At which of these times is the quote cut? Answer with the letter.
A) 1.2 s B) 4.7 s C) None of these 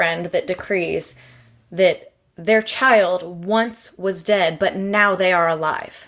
C